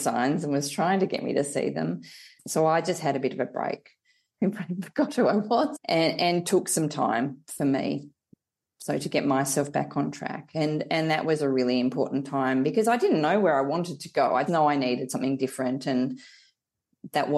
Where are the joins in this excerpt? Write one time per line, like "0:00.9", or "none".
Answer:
0:04.4
0:14.5